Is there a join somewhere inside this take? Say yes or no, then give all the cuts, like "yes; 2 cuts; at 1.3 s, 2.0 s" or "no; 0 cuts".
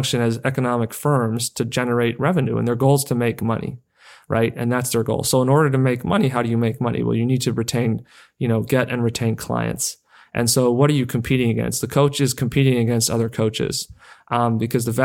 no; 0 cuts